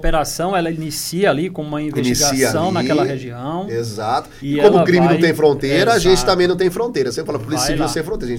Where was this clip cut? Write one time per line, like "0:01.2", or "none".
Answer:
none